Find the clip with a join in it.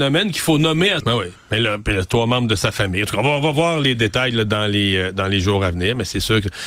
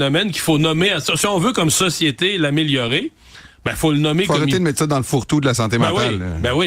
first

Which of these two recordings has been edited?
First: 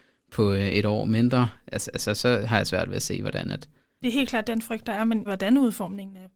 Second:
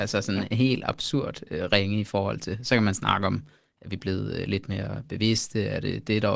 first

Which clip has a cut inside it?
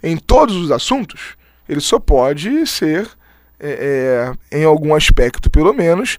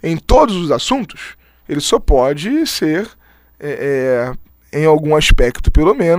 first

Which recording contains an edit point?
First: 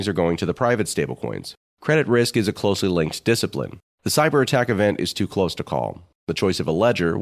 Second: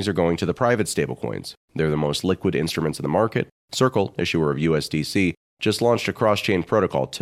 first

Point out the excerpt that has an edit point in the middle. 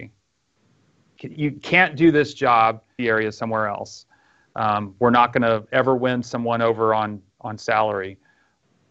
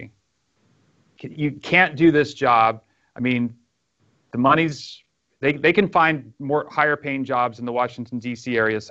first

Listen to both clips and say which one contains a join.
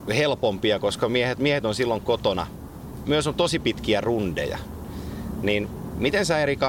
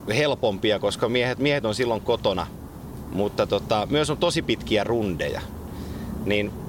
first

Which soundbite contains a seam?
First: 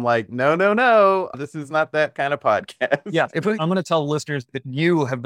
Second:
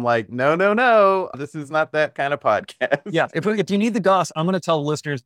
first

